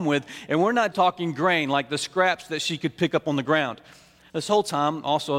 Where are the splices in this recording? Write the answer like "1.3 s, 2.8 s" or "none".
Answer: 0.9 s, 4.3 s